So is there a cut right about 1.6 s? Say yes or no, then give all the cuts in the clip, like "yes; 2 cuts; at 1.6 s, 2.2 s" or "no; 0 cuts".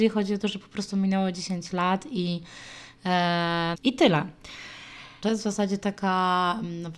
no; 2 cuts; at 3.7 s, 5.2 s